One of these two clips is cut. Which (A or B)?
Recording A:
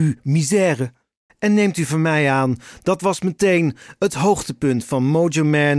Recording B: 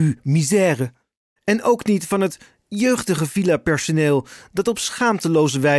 A